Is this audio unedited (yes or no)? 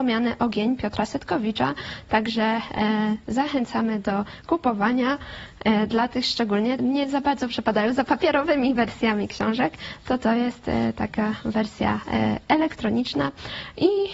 no